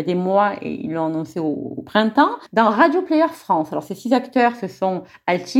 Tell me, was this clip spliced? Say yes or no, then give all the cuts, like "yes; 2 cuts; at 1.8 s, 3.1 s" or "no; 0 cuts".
yes; 1 cut; at 2.5 s